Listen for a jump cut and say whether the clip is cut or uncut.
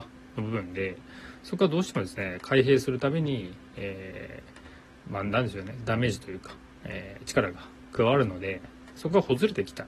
uncut